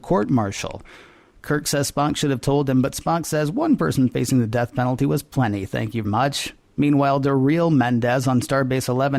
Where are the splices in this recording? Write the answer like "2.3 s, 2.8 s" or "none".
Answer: 6.0 s